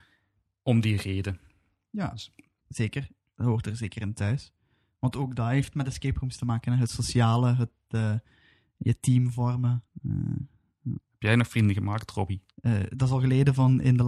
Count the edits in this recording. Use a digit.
1